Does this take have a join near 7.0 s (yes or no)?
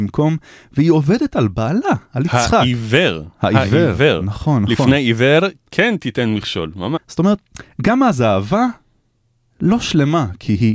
yes